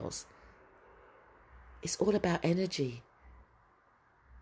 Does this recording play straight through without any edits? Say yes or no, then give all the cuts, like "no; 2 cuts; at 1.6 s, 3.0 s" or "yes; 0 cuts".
yes; 0 cuts